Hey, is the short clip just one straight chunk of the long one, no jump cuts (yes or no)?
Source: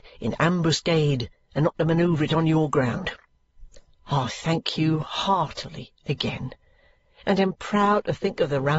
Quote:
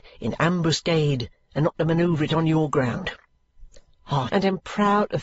no